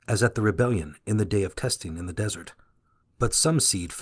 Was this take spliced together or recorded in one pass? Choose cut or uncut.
cut